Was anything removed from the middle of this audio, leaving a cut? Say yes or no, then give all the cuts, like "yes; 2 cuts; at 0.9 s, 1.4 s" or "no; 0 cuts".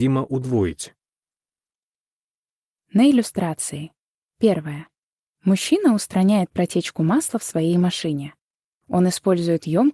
no; 0 cuts